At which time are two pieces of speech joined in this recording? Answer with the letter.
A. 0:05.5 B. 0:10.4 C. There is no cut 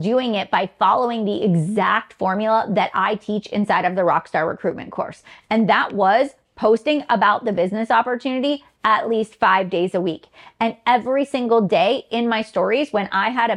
C